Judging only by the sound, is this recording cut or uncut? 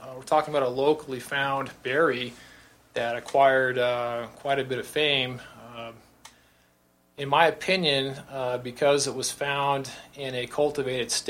uncut